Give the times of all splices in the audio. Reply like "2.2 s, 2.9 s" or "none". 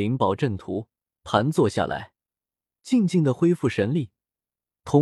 none